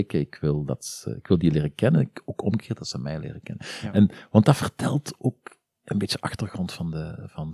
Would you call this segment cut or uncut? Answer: uncut